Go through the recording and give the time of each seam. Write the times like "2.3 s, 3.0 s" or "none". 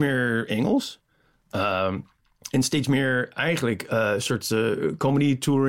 none